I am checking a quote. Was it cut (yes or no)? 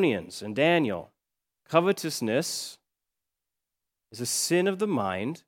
yes